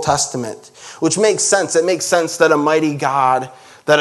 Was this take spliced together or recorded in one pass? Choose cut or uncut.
uncut